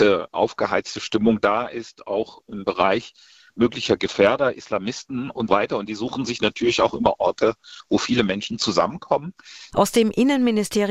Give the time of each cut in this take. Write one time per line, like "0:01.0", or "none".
0:05.5
0:09.7